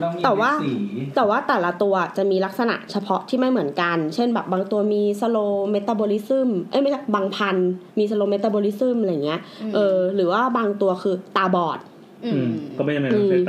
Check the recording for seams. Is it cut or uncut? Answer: cut